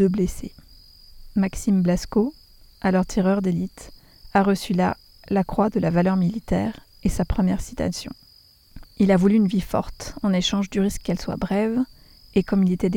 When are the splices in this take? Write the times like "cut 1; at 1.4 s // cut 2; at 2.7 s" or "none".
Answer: cut 1; at 8.8 s